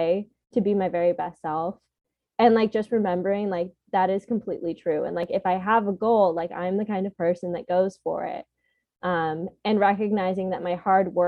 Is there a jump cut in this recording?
no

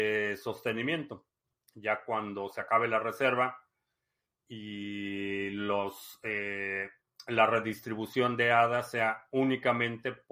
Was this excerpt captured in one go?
yes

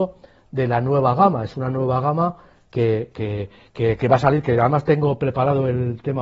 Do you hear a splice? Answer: no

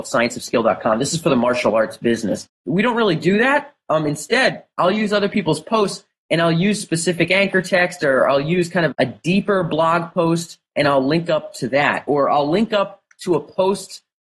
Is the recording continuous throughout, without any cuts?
no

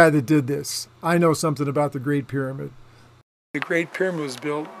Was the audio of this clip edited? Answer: no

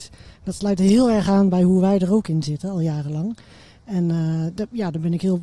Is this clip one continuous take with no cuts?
yes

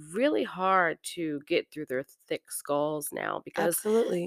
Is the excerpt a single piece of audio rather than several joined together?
yes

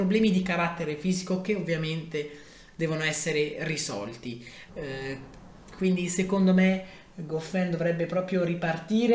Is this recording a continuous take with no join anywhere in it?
no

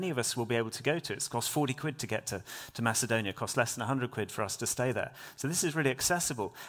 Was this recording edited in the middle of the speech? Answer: no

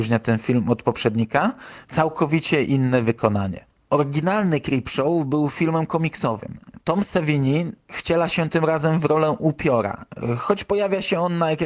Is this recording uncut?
no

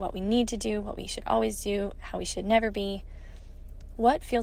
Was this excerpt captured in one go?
yes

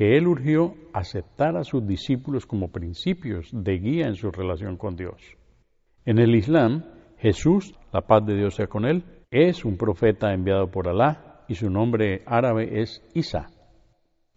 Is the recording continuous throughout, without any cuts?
yes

